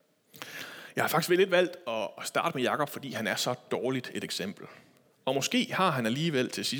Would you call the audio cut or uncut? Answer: cut